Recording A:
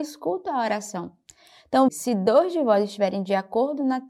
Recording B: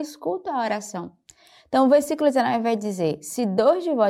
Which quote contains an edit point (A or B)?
A